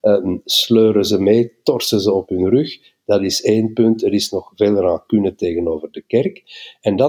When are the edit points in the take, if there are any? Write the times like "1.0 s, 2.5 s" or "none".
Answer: none